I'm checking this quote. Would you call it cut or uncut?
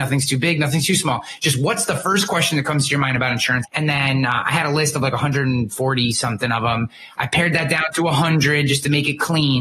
cut